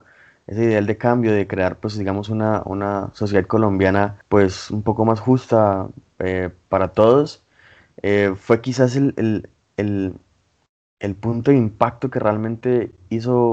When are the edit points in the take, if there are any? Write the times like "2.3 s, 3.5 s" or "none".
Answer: none